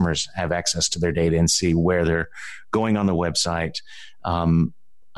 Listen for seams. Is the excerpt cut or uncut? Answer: uncut